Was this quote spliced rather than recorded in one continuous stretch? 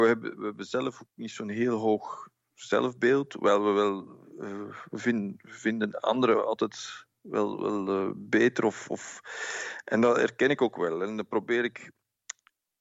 no; 0 cuts

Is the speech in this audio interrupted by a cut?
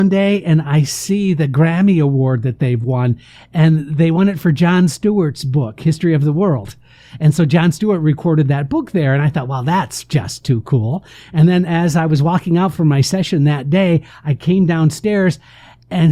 no; 0 cuts

